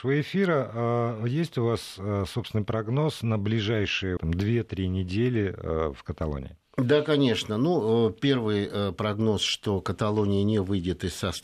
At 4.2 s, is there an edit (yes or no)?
yes